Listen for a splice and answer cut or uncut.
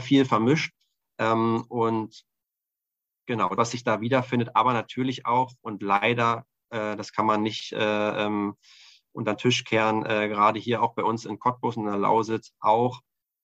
cut